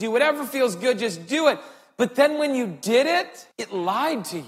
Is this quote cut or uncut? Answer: cut